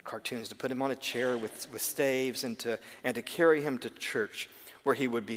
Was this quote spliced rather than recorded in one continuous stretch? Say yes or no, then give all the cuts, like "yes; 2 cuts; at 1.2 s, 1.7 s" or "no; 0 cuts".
no; 0 cuts